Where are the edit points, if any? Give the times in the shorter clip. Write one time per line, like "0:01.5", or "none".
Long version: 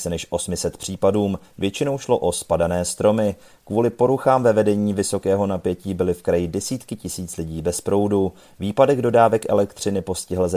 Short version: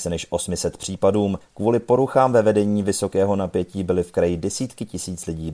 0:01.4